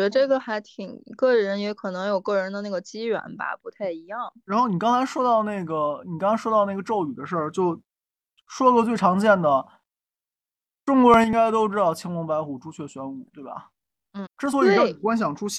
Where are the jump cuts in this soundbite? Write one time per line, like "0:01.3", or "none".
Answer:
0:14.3